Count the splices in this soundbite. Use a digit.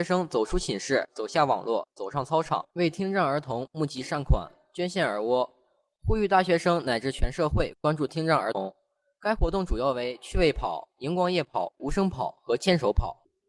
1